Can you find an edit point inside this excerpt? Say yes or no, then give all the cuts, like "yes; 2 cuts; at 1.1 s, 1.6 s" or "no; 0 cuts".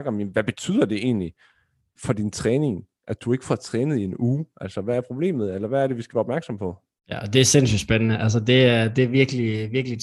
no; 0 cuts